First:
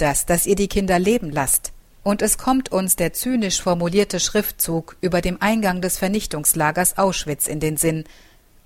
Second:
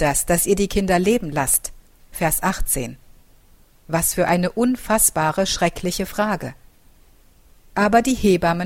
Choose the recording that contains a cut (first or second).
first